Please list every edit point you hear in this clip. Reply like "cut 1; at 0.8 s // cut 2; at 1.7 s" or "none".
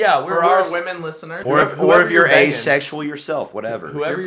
cut 1; at 1.4 s